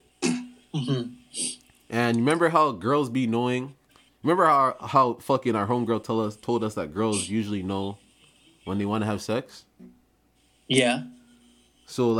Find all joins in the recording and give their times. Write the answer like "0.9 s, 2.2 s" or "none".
none